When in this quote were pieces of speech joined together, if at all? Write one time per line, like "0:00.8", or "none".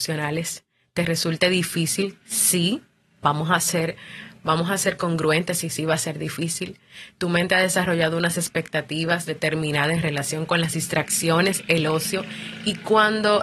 none